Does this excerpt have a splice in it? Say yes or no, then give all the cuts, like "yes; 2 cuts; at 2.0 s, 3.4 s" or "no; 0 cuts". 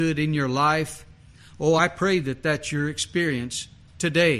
yes; 1 cut; at 1.8 s